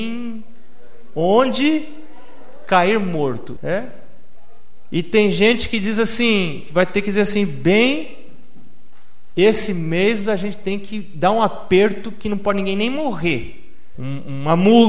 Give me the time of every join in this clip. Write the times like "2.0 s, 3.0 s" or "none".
3.6 s, 13.9 s